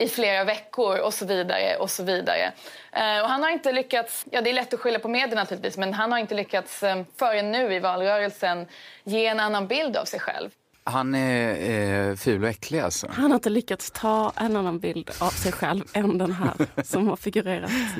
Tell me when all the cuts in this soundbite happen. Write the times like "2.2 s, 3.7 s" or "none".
4.2 s